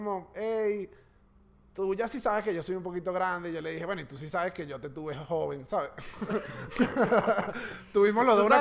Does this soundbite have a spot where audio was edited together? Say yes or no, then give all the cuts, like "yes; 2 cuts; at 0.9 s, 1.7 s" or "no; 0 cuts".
no; 0 cuts